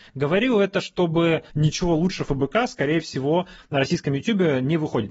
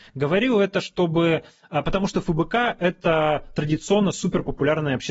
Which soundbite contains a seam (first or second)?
first